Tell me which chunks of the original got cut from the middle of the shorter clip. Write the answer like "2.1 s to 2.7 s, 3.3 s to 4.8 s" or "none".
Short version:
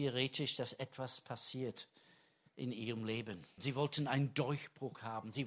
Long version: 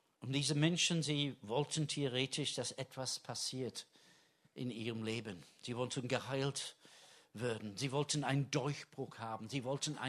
5.6 s to 7.7 s